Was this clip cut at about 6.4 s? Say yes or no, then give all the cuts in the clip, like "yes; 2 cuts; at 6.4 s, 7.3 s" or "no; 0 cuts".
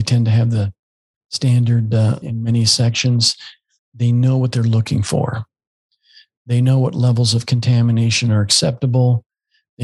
no; 2 cuts; at 2.2 s, 3.8 s